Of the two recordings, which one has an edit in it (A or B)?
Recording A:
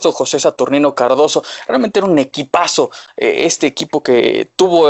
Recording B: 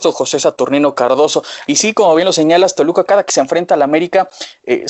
B